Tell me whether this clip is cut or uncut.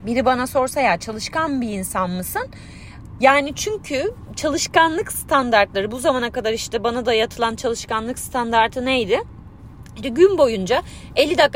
cut